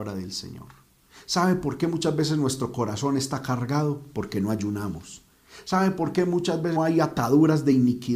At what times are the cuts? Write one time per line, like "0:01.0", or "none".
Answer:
0:06.8